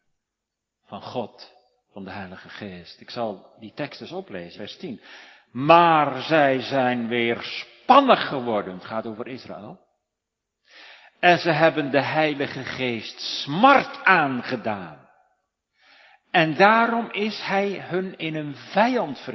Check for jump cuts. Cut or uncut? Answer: cut